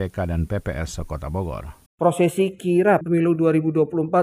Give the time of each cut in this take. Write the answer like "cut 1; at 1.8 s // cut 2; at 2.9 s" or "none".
cut 1; at 1.9 s